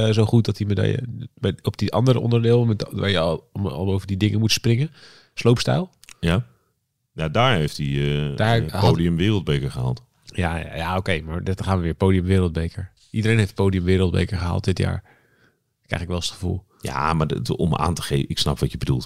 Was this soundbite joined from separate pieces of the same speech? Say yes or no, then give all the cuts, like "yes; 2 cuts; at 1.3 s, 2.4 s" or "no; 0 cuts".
no; 0 cuts